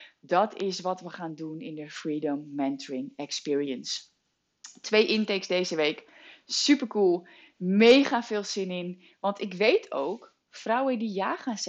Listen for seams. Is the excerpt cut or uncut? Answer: uncut